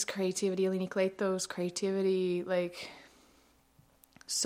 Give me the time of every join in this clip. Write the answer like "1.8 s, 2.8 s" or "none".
none